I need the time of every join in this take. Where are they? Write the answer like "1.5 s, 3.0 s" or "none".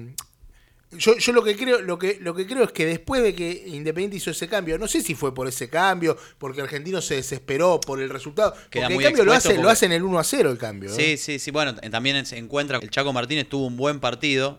12.8 s